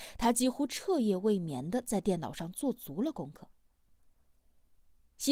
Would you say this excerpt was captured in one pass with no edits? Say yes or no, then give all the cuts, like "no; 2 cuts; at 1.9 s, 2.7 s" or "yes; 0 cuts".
yes; 0 cuts